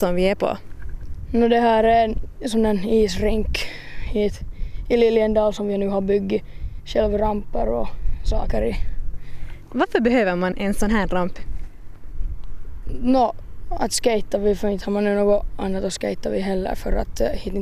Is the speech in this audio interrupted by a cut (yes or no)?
yes